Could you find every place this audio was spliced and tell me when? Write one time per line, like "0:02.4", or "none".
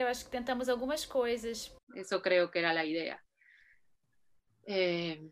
0:01.8